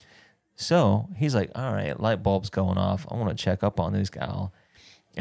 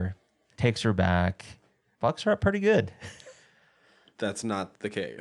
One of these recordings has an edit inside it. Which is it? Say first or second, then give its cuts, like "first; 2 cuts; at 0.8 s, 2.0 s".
second; 1 cut; at 4.1 s